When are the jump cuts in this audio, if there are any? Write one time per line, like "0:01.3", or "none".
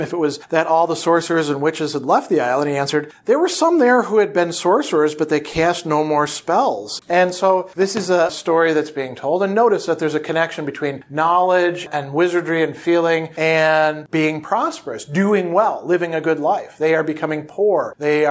0:07.0